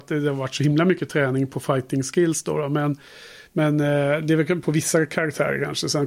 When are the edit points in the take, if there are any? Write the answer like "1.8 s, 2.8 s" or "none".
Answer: none